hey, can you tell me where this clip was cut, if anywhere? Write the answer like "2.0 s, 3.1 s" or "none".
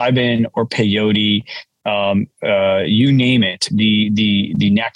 none